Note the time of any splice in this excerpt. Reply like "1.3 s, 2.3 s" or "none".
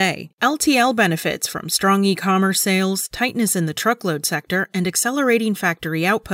none